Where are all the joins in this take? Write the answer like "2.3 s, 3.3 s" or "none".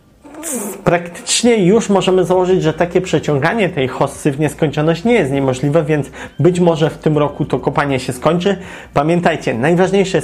none